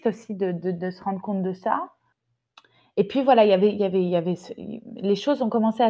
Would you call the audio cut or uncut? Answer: uncut